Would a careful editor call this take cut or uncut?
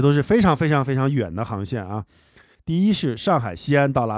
cut